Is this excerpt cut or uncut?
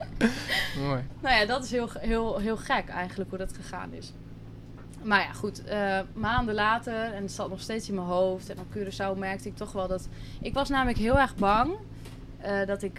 uncut